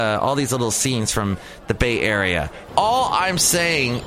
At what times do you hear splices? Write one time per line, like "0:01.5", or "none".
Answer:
0:02.7